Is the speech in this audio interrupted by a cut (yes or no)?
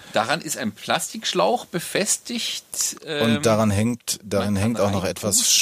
no